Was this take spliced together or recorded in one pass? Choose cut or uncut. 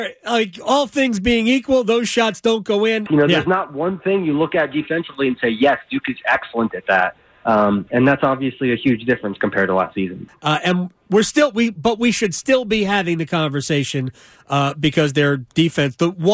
cut